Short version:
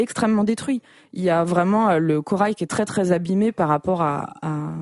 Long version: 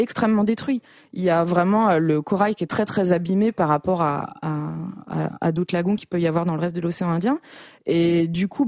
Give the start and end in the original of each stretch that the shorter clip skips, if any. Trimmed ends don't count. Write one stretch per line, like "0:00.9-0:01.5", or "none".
none

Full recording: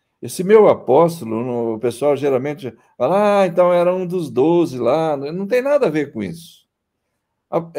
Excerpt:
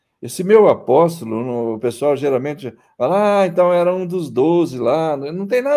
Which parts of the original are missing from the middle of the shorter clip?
none

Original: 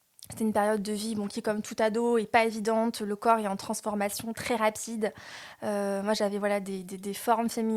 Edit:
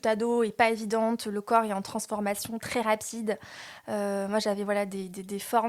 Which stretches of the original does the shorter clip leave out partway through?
none

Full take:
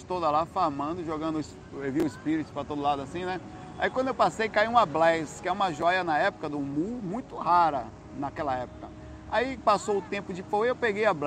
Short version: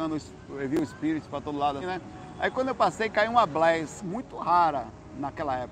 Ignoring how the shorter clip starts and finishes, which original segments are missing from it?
0:03.0-0:03.2
0:05.4-0:07.0

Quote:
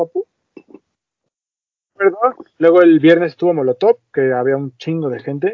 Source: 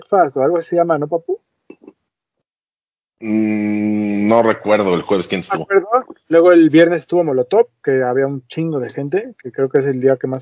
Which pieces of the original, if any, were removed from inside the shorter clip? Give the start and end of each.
0:03.1-0:05.7

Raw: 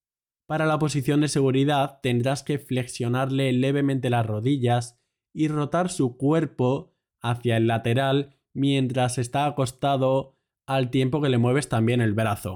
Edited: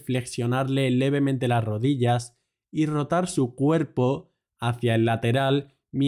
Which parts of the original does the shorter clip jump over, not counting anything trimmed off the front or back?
none

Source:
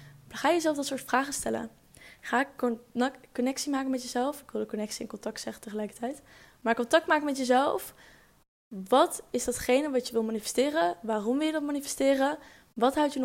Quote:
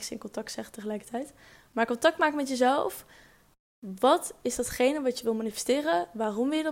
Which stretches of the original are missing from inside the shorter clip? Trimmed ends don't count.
none

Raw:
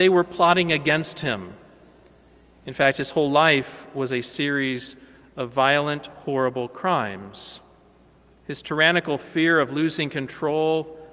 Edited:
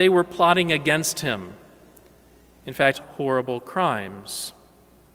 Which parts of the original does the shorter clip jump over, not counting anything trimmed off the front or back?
0:02.9-0:06.0

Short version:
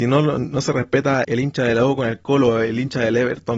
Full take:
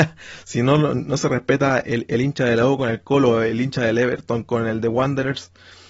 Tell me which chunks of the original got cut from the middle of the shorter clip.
0:01.8-0:02.1

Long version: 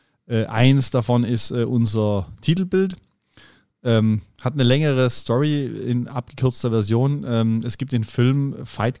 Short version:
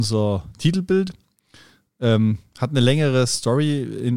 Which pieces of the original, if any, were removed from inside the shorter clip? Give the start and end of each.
none

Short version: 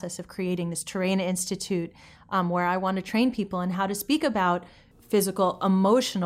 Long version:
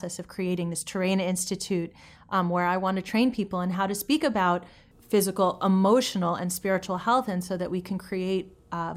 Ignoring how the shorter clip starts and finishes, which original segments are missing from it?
none

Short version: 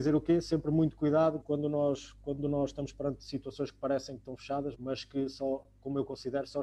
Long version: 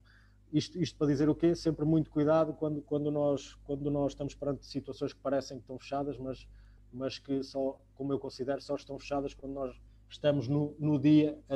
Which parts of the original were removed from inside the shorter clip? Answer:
0:02.5-0:02.8
0:06.2-0:06.9

